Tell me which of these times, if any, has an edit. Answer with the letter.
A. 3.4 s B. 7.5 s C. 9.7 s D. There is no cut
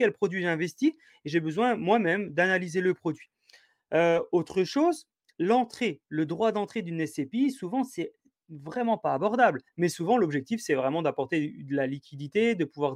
C